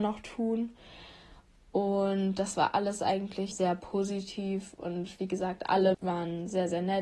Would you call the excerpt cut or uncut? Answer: cut